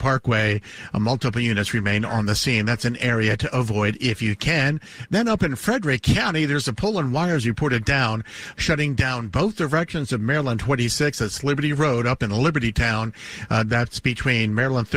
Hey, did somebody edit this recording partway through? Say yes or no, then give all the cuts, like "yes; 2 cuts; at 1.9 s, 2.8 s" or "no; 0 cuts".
no; 0 cuts